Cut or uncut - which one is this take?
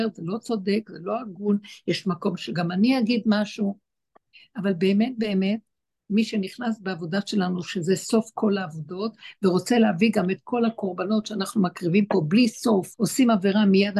cut